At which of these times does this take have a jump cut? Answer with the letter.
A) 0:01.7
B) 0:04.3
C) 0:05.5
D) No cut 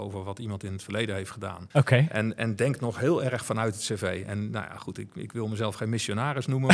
A